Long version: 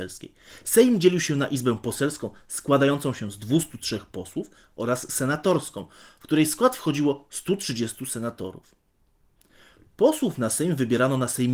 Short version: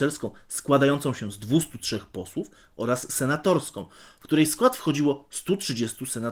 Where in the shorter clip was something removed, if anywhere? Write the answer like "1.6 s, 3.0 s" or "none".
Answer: none